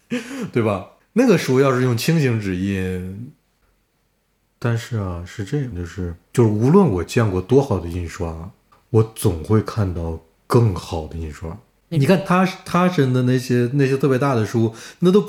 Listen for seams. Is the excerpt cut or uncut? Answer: cut